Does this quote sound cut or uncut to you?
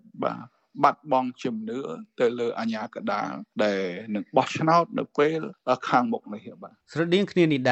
cut